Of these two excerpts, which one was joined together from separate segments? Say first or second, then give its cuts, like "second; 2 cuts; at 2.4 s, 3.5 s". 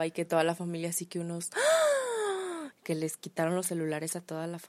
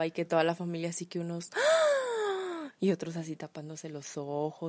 first; 1 cut; at 2.7 s